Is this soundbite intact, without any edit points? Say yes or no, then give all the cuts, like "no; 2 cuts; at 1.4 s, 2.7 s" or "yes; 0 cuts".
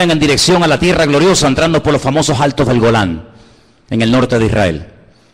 yes; 0 cuts